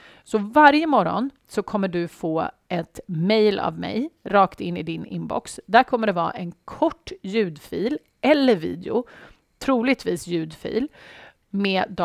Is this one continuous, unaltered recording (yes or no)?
yes